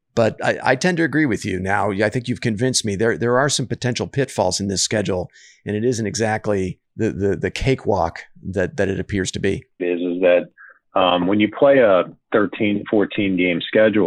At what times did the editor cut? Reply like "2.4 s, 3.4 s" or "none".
9.8 s